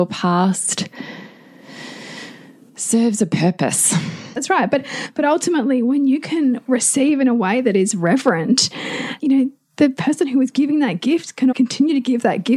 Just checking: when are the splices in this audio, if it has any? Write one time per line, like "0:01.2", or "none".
0:04.4
0:09.2
0:11.5